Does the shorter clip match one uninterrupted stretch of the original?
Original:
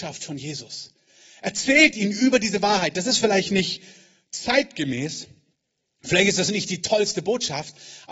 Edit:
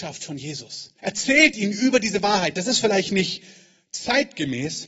no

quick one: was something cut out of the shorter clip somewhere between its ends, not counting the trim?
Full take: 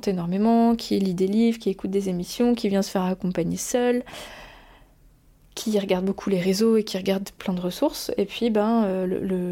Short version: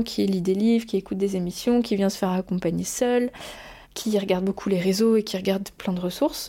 yes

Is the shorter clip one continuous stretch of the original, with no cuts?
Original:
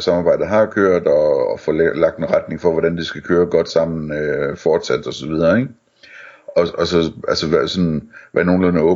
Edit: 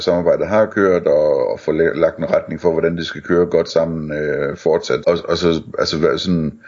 no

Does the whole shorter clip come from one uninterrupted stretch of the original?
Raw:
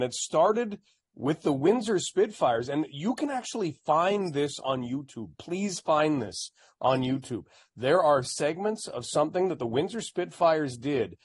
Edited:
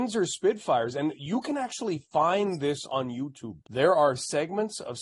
no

